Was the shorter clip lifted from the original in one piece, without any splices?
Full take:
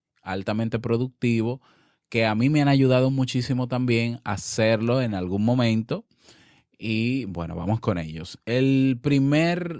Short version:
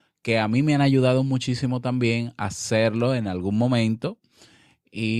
yes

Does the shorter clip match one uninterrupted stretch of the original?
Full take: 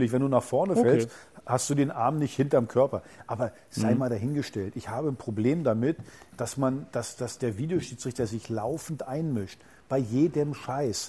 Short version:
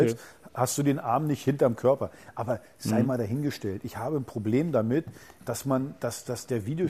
yes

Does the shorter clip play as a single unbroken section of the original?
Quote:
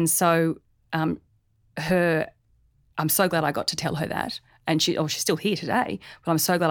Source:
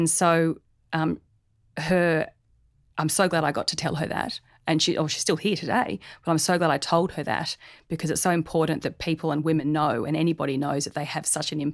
yes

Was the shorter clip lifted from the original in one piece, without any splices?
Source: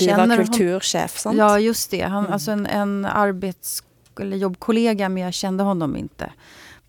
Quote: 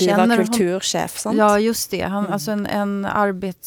yes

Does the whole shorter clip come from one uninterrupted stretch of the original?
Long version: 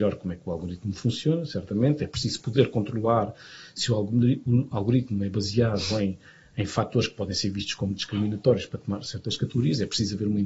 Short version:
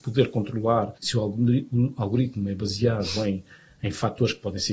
no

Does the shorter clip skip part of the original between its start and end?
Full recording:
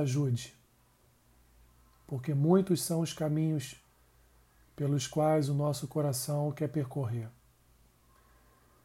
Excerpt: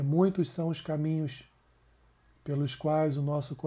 no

